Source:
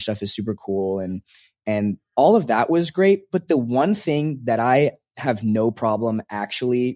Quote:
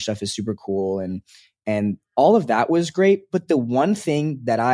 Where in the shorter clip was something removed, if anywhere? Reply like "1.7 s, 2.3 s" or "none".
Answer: none